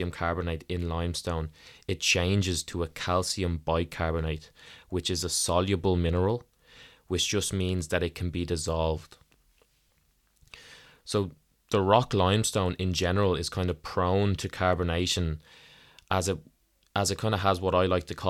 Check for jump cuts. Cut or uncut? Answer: uncut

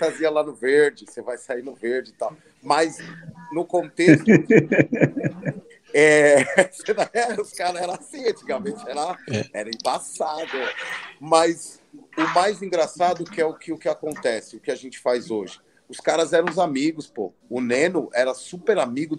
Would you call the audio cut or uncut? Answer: uncut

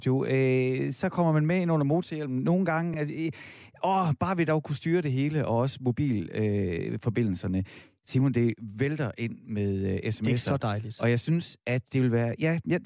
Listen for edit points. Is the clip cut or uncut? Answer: uncut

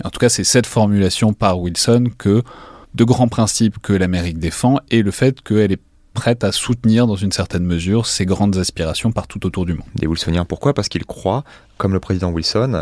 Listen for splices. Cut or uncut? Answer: cut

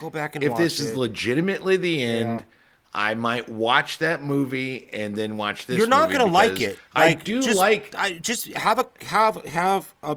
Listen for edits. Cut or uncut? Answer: uncut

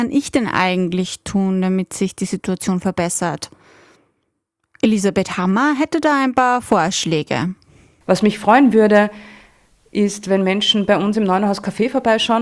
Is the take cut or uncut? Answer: uncut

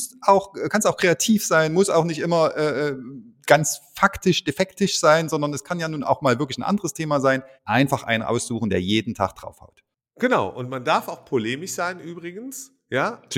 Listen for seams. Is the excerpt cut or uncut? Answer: cut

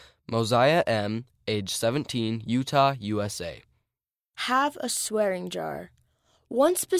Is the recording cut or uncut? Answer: uncut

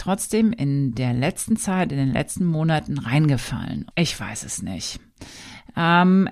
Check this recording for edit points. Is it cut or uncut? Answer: cut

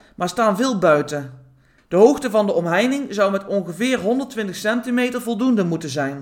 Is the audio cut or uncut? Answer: cut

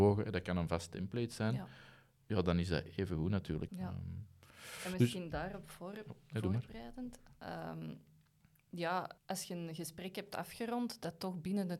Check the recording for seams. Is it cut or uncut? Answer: cut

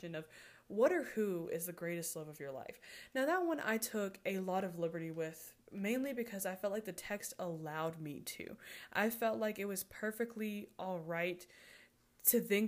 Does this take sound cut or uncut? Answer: uncut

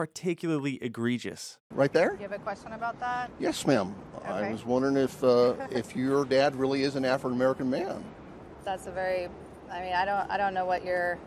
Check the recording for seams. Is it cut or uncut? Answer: cut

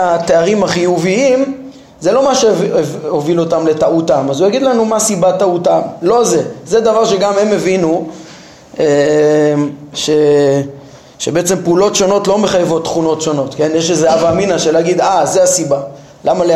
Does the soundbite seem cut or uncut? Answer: uncut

